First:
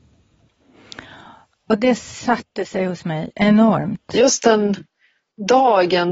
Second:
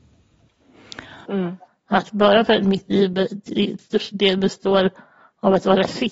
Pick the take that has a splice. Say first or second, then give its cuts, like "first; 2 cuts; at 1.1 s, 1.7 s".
second; 2 cuts; at 1.3 s, 3.8 s